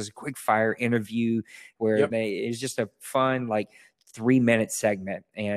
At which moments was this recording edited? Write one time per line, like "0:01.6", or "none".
0:02.1